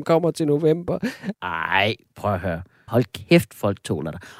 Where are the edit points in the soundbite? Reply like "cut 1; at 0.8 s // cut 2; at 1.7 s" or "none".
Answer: cut 1; at 1.3 s // cut 2; at 2.9 s